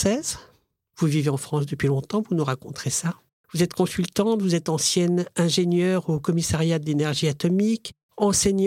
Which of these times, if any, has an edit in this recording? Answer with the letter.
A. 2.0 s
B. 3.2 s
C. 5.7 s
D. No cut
D